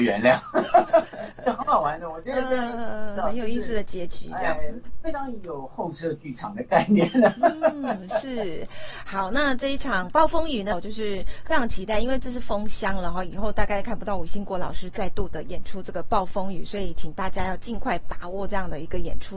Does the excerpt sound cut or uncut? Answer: cut